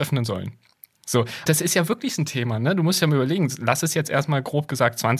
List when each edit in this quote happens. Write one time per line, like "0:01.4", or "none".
0:01.5